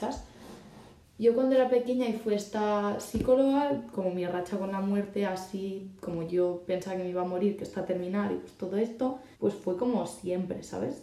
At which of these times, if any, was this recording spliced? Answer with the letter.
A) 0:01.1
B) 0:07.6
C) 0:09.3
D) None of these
C